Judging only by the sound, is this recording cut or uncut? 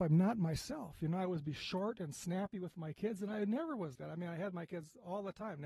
cut